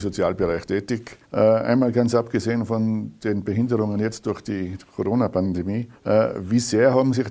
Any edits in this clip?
yes; 2 cuts; at 1.2 s, 6.0 s

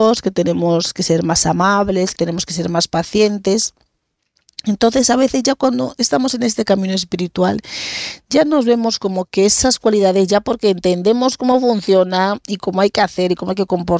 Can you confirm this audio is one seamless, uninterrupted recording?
no; 1 cut; at 2.1 s

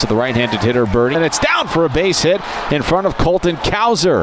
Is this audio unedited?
no; 1 cut; at 1.1 s

